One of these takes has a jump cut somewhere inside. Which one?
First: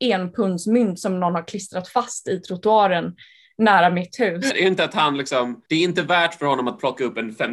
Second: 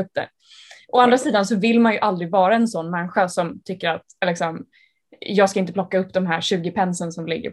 first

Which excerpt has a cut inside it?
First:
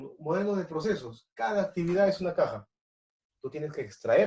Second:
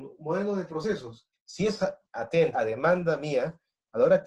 second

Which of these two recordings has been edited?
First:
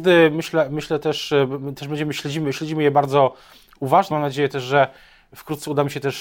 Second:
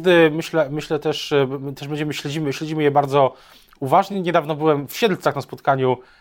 first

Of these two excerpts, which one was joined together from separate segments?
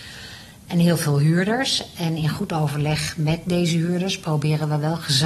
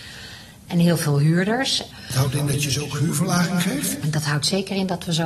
second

